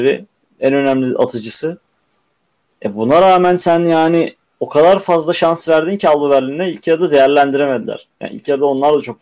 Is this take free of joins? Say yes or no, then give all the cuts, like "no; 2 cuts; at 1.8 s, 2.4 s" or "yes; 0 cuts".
yes; 0 cuts